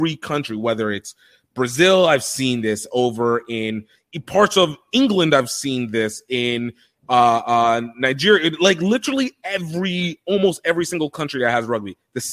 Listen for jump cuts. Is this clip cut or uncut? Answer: uncut